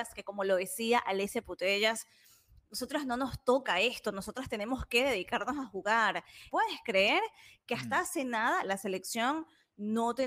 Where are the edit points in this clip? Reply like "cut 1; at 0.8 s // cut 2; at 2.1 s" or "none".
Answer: cut 1; at 6.5 s